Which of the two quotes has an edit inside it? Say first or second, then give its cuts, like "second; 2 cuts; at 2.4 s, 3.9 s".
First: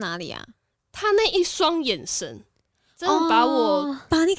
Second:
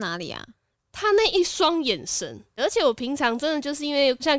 second; 1 cut; at 2.6 s